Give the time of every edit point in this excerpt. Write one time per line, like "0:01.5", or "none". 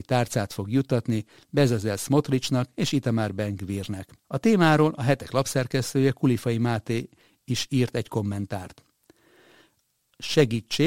0:04.2